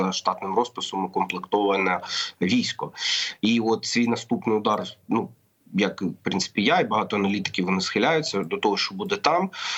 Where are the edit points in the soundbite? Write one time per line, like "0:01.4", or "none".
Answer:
none